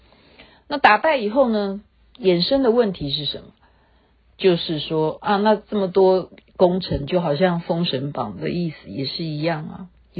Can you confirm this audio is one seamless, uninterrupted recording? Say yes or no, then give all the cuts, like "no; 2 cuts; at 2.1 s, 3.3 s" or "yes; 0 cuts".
yes; 0 cuts